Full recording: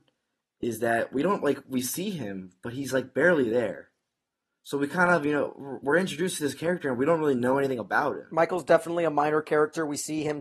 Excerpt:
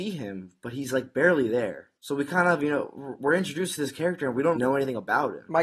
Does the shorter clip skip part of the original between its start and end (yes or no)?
yes